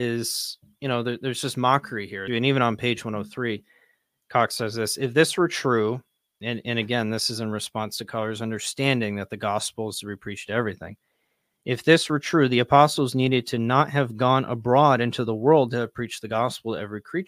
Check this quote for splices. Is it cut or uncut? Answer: cut